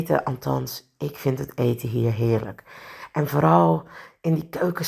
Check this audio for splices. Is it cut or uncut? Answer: uncut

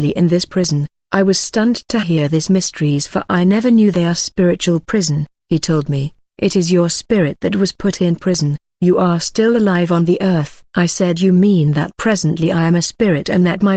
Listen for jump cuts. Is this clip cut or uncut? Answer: cut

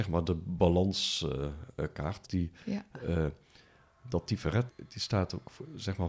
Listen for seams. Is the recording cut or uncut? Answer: cut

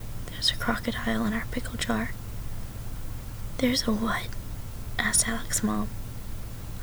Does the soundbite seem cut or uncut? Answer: uncut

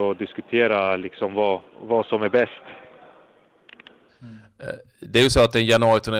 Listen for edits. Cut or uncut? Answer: cut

